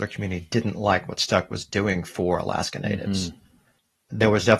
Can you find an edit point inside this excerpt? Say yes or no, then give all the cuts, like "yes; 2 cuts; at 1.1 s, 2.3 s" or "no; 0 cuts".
no; 0 cuts